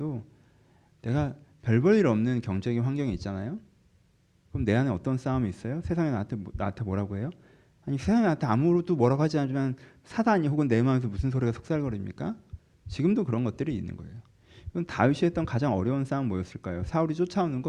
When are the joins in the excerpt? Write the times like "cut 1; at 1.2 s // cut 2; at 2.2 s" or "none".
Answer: cut 1; at 12.7 s